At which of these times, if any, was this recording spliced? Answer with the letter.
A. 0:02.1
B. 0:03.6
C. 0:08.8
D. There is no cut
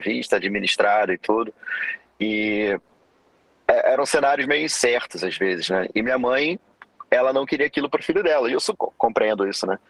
C